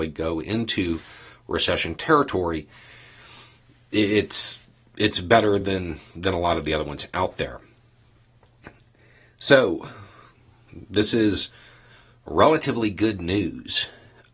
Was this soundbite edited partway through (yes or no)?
no